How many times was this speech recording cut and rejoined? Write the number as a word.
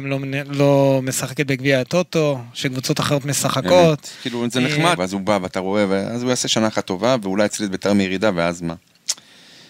one